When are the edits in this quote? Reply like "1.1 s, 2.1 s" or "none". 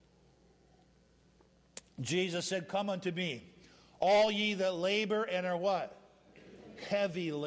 none